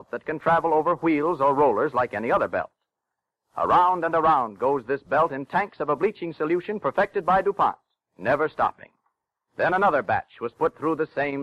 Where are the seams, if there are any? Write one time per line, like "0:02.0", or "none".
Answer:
0:09.5